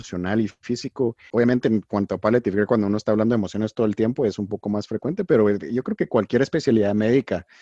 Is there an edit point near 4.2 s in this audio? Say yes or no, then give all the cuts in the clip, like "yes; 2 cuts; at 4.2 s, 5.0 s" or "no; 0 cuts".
no; 1 cut; at 1.3 s